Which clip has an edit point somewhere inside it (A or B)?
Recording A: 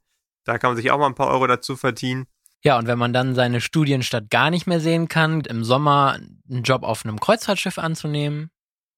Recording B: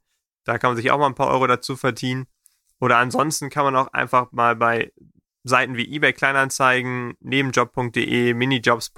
A